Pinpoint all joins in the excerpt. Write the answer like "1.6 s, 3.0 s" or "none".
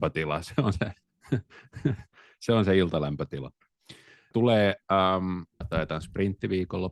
4.3 s, 5.6 s